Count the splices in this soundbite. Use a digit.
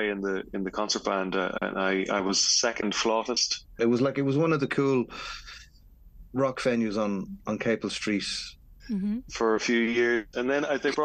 2